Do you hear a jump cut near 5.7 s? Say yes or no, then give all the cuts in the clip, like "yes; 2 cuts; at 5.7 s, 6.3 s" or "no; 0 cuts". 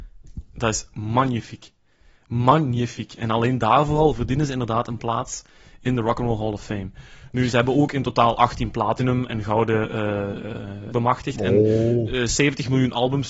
no; 1 cut; at 10.9 s